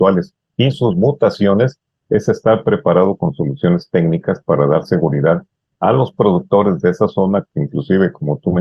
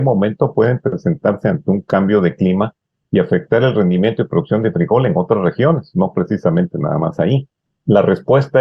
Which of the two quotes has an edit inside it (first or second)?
second